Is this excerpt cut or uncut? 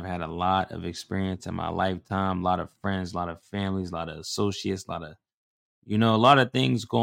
uncut